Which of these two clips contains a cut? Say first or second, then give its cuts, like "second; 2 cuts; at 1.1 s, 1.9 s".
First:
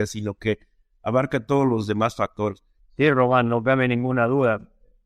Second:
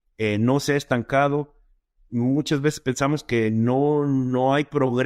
first; 1 cut; at 2.8 s